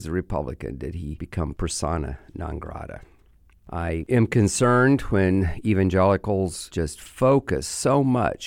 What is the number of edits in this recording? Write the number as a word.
zero